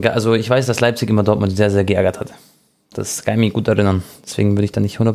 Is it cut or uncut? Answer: uncut